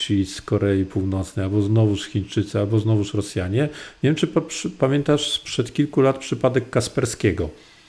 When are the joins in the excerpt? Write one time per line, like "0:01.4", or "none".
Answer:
none